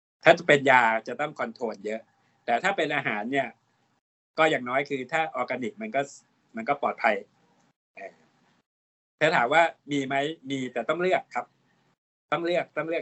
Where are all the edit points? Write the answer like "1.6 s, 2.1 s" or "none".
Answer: none